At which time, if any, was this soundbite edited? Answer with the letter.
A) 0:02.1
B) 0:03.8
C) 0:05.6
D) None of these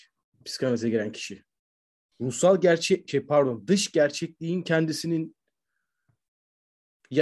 A